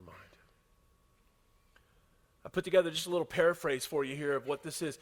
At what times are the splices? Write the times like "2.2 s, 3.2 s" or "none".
none